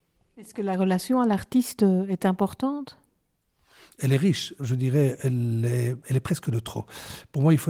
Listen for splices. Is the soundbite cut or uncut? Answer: cut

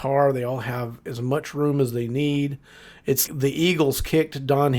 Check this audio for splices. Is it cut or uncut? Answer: cut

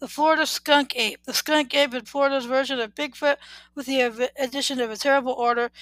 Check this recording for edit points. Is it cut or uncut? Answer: cut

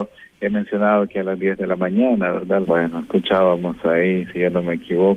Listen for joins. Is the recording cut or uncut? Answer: cut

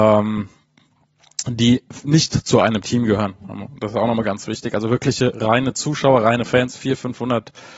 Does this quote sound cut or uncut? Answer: uncut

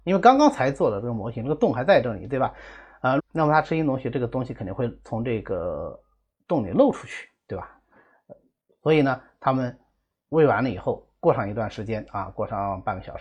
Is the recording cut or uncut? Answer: cut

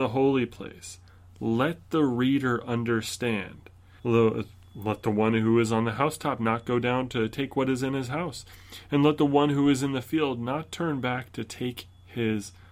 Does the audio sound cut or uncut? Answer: cut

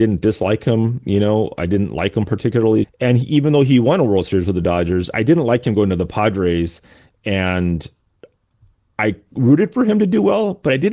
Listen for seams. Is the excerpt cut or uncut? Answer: cut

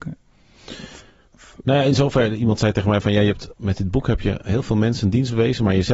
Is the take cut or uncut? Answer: uncut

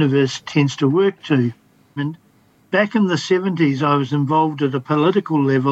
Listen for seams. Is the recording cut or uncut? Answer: cut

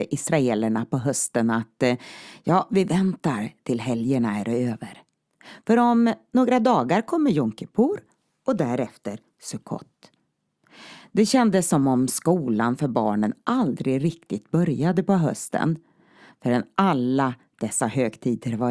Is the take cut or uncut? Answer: uncut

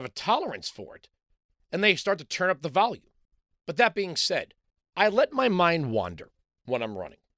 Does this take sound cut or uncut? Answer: uncut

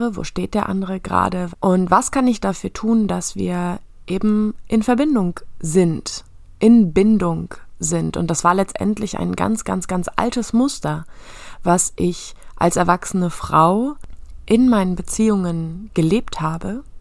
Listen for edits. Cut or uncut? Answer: cut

